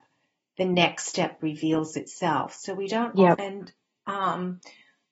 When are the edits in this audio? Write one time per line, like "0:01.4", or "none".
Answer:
0:03.3